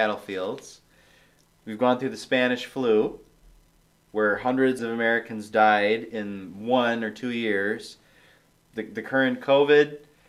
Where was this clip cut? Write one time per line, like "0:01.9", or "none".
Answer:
0:04.8